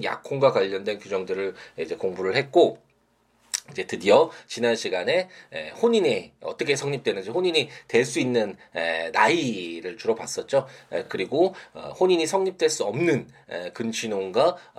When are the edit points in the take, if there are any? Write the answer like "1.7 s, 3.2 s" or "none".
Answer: none